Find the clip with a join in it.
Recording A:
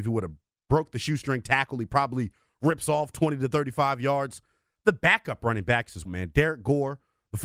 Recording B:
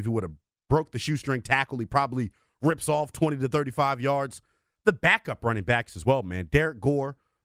A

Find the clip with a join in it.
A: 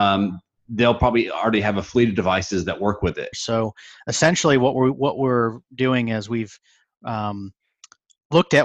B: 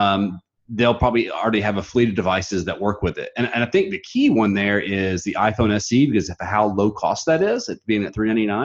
A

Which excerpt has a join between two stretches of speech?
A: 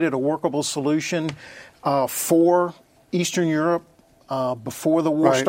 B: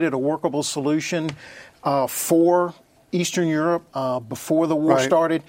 B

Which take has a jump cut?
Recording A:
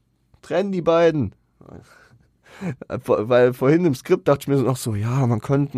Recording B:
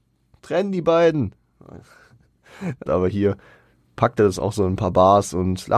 B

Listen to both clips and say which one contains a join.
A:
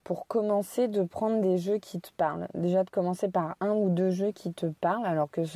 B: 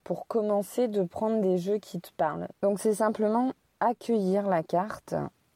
B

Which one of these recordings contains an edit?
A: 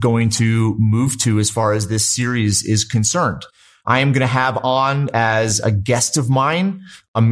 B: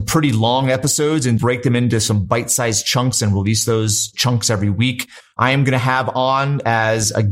B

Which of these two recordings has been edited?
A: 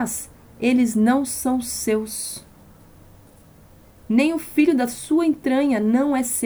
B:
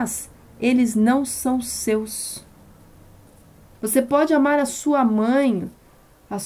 B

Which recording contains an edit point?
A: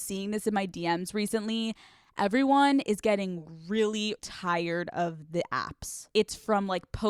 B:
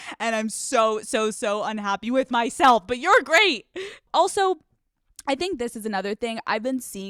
A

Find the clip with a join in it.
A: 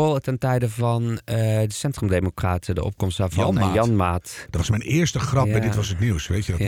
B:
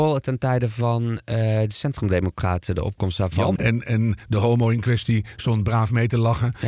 B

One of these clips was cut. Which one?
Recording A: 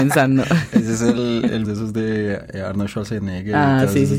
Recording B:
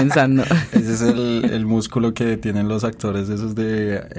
A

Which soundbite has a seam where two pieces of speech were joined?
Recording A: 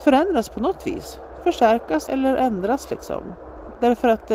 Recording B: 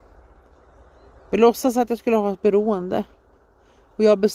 A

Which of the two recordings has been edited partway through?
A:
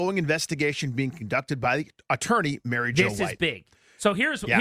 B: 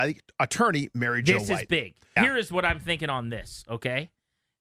B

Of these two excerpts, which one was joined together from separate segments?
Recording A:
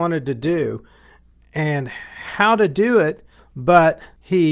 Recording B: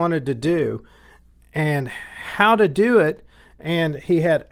A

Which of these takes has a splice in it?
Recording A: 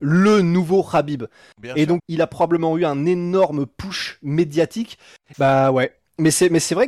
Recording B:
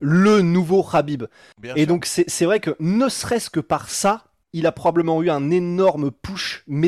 A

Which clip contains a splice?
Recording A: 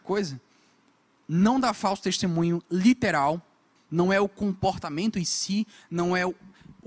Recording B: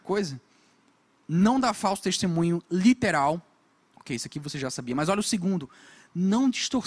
A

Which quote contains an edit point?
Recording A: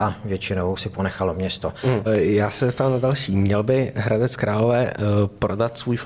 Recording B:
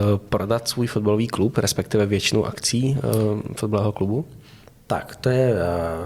A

